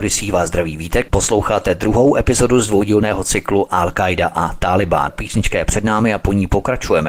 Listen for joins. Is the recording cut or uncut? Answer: cut